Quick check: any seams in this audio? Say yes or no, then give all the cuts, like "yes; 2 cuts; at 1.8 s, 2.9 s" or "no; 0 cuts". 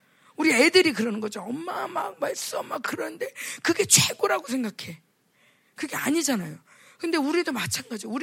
no; 0 cuts